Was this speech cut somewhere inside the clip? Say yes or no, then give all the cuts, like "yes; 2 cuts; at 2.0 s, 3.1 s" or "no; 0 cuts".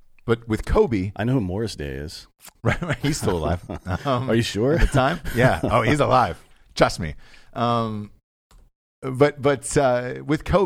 no; 0 cuts